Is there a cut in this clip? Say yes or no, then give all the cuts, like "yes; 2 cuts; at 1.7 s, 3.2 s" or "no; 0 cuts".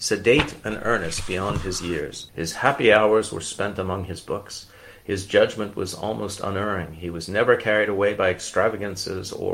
yes; 1 cut; at 2.3 s